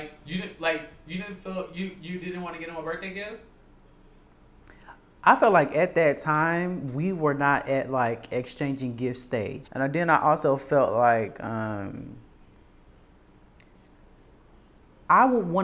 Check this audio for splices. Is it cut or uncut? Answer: cut